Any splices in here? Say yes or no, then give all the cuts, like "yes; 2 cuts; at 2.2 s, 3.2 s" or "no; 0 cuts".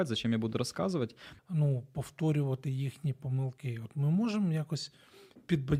yes; 1 cut; at 1.4 s